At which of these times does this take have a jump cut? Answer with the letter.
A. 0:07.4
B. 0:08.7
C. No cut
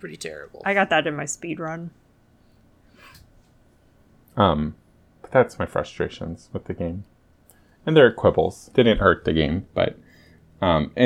B